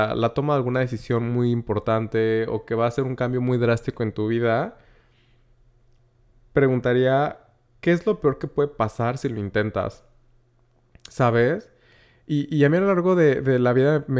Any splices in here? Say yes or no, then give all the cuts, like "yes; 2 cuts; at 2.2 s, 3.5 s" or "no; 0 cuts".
no; 0 cuts